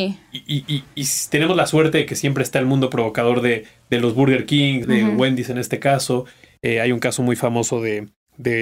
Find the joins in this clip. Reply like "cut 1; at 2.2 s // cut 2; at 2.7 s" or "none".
cut 1; at 4.8 s